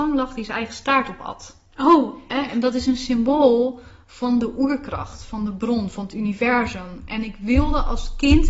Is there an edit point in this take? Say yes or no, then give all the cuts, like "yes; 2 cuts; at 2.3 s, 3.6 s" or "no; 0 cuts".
no; 0 cuts